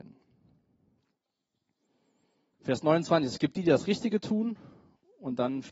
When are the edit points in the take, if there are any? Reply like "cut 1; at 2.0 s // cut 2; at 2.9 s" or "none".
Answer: cut 1; at 2.5 s